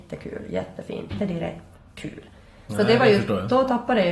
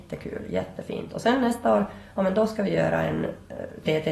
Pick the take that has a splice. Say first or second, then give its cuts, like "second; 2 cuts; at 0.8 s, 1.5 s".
first; 1 cut; at 1.1 s